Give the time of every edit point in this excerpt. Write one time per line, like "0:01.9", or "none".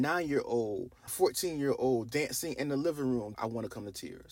0:01.1
0:03.3